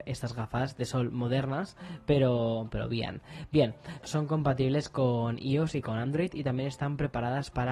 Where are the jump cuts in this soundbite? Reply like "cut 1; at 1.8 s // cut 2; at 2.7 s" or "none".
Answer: cut 1; at 2.7 s // cut 2; at 4.0 s